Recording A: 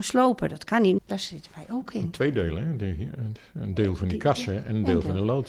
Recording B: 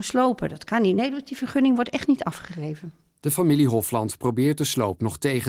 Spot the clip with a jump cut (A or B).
A